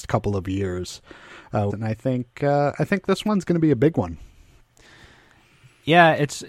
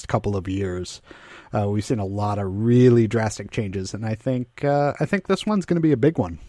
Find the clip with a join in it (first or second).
first